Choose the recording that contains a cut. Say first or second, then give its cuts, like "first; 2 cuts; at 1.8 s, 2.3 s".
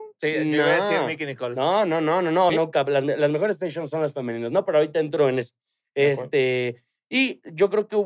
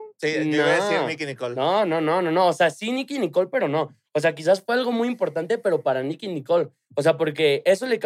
first; 1 cut; at 2.5 s